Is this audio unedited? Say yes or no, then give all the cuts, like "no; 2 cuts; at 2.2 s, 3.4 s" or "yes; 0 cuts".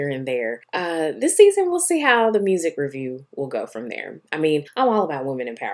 yes; 0 cuts